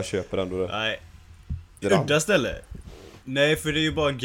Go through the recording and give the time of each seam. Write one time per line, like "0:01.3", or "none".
0:01.8